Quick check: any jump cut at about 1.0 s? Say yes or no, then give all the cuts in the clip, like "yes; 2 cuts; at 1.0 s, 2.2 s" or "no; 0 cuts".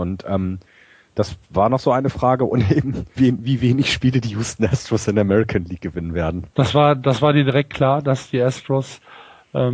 no; 2 cuts; at 3.2 s, 6.5 s